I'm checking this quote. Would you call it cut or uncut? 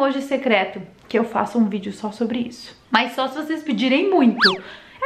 cut